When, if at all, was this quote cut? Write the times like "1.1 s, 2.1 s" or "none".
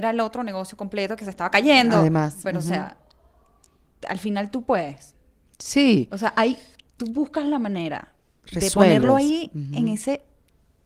none